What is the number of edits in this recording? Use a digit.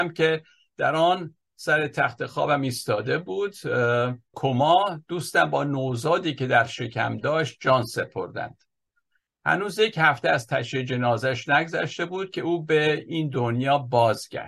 1